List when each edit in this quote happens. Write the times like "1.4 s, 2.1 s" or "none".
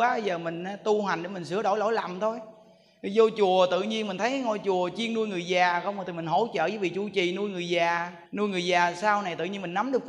8.3 s